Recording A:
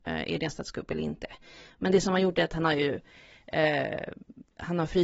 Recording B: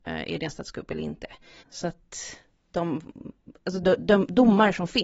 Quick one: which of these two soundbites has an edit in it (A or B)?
B